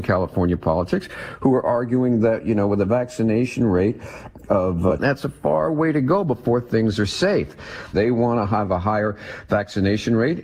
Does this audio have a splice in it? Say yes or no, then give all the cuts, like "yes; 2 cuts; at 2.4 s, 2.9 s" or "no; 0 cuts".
yes; 2 cuts; at 5.0 s, 7.9 s